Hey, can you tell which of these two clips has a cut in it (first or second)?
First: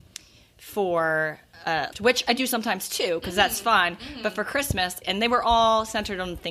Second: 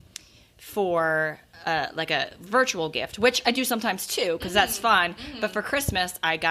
first